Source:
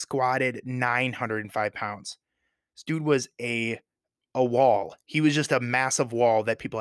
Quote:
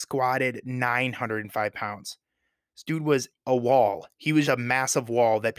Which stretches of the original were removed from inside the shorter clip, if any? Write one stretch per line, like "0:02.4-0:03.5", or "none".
0:03.3-0:04.2
0:05.3-0:05.5

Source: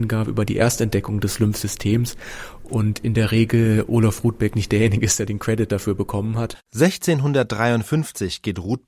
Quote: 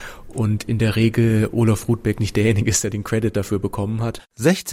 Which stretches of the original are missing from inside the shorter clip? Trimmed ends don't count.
none

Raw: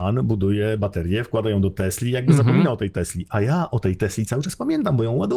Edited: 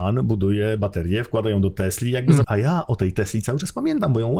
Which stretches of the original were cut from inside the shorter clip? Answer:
0:02.4-0:03.3

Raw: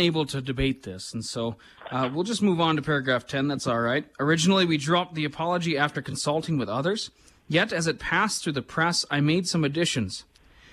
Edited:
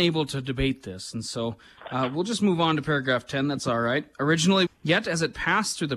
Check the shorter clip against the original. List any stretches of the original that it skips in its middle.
0:04.7-0:07.3

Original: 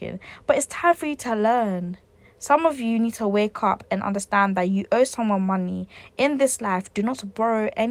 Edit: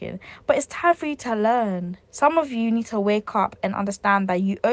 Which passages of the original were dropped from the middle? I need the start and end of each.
0:02.1-0:02.3

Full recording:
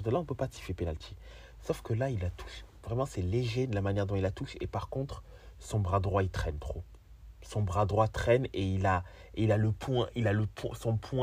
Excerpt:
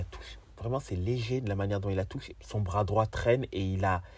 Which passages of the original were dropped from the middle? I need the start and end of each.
0:04.6-0:07.3

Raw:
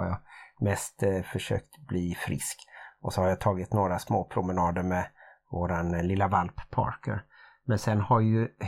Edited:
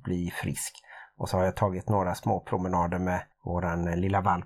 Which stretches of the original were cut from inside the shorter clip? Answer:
0:05.2-0:05.4

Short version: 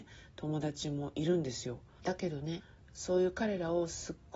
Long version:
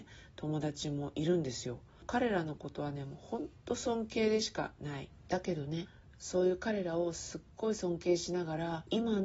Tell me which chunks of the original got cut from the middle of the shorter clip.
0:02.0-0:05.2

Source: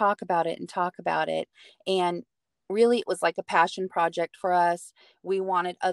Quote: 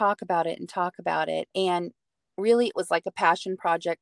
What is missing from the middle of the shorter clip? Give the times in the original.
0:01.5-0:01.8

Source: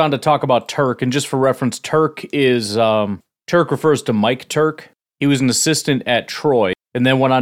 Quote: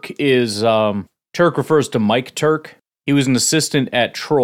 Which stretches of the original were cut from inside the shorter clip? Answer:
none

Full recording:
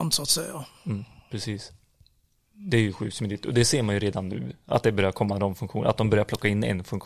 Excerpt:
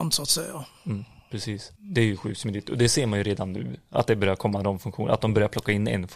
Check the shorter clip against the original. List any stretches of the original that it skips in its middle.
0:01.8-0:02.5

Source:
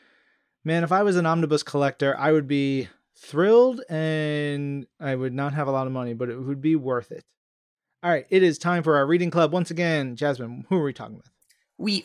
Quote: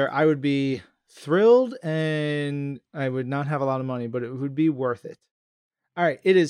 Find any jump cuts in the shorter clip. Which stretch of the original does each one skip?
none

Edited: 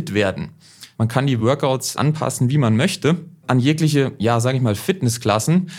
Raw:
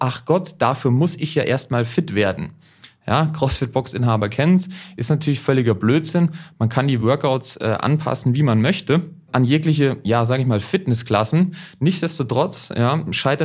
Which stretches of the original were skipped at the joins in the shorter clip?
0:03.0-0:06.6
0:07.6-0:07.8

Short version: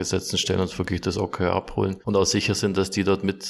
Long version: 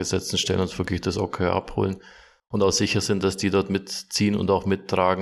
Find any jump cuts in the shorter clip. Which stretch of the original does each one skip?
0:02.0-0:02.5

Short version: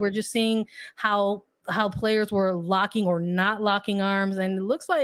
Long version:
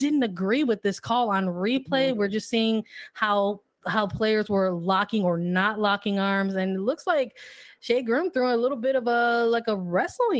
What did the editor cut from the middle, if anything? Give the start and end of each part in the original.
none

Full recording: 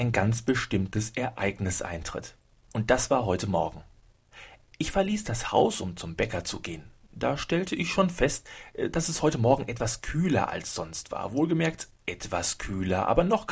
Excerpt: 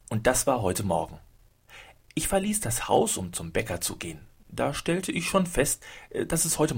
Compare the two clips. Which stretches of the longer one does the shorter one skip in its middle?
none

